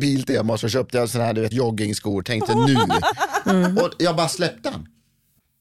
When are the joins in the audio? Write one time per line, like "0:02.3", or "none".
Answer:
0:01.5